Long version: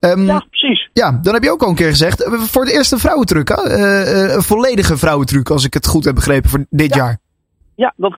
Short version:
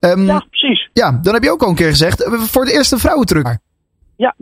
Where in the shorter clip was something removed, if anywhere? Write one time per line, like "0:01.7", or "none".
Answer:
0:03.4